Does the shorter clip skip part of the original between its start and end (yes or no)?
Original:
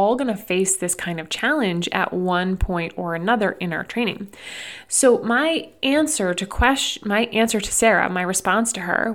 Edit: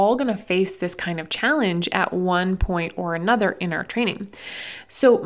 no